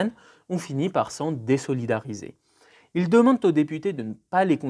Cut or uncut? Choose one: uncut